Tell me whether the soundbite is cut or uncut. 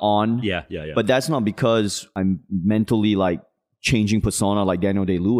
uncut